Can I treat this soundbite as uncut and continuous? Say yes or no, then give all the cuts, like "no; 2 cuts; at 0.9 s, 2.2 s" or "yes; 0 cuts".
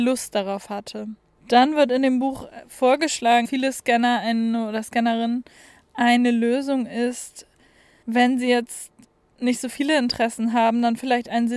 no; 3 cuts; at 1.4 s, 3.4 s, 8.0 s